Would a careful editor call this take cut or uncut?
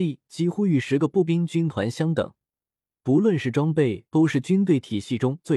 cut